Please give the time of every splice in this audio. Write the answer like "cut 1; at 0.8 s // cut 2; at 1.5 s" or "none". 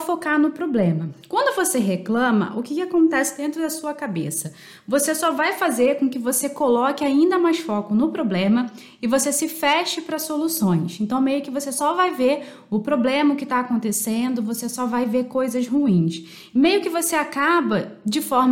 none